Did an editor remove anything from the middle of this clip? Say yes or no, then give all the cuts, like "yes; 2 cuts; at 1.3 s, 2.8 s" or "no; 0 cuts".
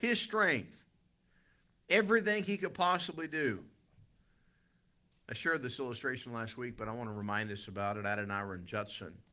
no; 0 cuts